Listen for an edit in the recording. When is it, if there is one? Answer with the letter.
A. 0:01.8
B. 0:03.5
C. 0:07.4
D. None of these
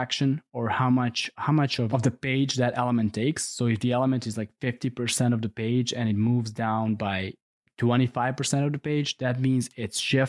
D